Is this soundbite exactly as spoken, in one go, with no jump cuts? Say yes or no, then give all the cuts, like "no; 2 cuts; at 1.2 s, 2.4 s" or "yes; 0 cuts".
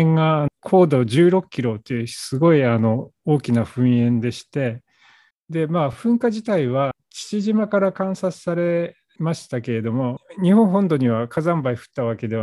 yes; 0 cuts